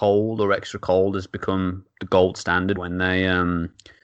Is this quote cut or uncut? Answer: cut